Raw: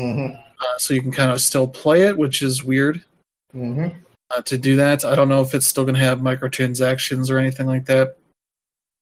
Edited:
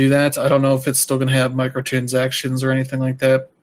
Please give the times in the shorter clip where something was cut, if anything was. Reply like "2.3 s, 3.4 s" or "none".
none